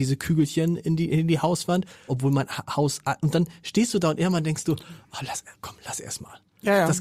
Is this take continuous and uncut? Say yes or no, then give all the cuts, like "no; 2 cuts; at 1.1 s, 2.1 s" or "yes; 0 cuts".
no; 1 cut; at 2.1 s